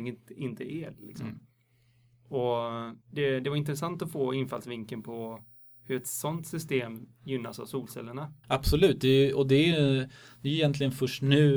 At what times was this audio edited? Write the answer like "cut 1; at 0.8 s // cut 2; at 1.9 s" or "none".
cut 1; at 3.0 s // cut 2; at 8.4 s